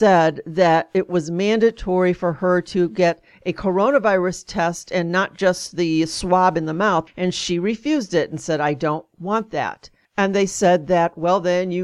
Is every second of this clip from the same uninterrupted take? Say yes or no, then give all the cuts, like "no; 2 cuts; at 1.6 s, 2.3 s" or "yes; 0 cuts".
no; 1 cut; at 7.1 s